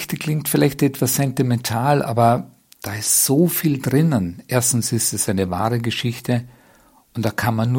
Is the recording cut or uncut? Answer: uncut